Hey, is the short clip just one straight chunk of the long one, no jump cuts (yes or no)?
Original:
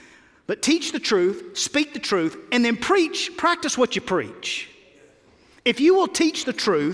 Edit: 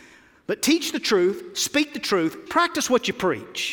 no